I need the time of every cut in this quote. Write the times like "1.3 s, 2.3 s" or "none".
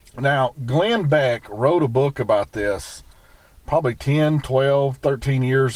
none

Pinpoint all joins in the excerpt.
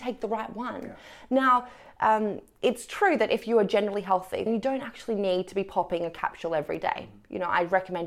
4.5 s

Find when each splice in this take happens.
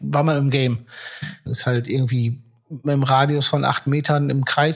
1.5 s

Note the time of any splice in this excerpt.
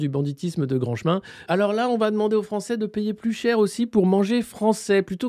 1.5 s

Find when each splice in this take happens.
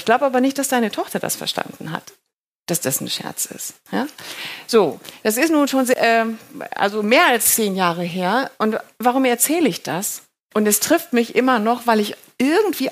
10.5 s

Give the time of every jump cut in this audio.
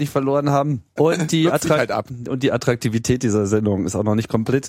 1.0 s

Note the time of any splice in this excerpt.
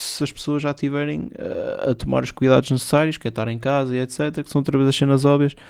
none

